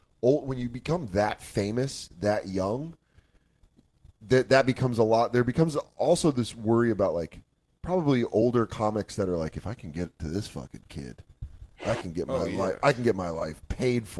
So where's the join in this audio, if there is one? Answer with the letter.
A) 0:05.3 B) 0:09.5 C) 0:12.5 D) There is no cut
D